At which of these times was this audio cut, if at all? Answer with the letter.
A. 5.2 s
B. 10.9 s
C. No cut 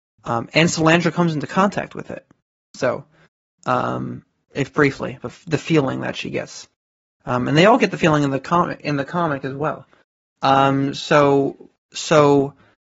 A